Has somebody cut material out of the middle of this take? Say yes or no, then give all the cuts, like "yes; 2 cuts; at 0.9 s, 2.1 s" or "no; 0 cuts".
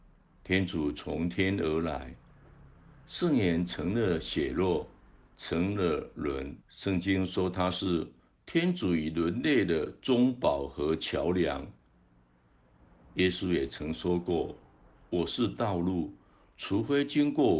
yes; 1 cut; at 6.6 s